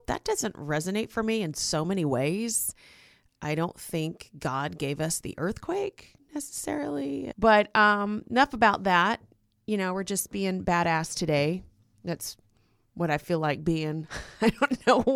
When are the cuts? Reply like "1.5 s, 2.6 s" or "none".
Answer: 7.3 s